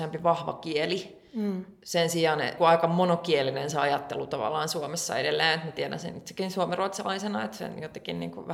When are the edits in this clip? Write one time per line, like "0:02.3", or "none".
0:02.6